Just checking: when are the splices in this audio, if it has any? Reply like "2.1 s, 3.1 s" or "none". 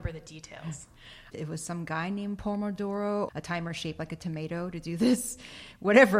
1.3 s, 3.3 s